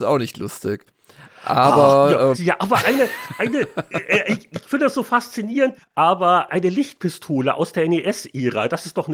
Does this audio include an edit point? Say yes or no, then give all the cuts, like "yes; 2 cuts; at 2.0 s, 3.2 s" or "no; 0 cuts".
yes; 2 cuts; at 2.3 s, 5.8 s